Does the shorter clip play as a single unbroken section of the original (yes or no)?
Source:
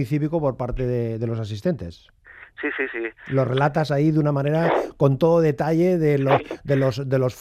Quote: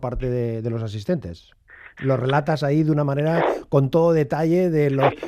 no